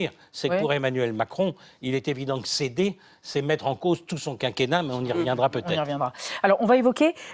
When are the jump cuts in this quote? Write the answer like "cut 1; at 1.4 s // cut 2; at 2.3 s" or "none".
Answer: none